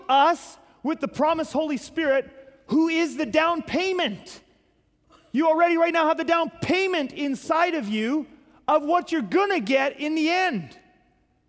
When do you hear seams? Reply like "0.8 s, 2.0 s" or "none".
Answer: none

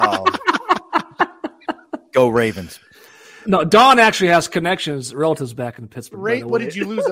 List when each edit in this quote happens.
3.4 s

